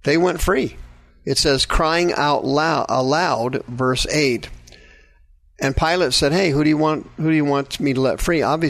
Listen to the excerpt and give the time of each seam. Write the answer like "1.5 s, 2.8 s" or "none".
1.1 s, 5.5 s